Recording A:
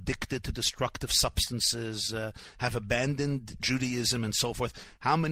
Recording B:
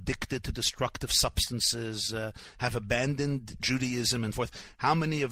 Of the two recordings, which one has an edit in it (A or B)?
B